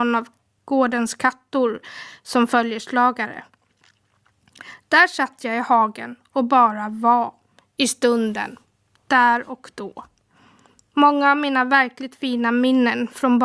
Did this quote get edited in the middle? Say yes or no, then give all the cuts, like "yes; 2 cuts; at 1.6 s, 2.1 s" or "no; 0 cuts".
no; 0 cuts